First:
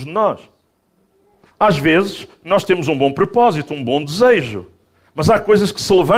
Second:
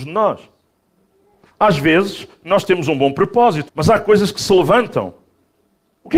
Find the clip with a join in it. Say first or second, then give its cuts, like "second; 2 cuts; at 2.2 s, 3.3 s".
second; 1 cut; at 3.7 s